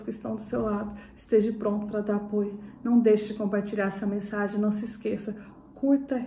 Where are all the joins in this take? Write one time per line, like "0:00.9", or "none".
none